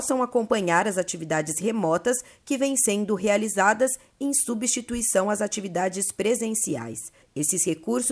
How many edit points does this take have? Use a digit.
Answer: 1